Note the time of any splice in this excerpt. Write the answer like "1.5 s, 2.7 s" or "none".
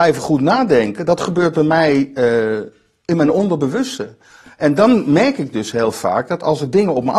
none